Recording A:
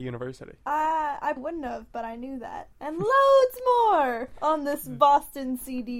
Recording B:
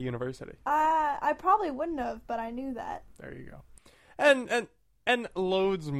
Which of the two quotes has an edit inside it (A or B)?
A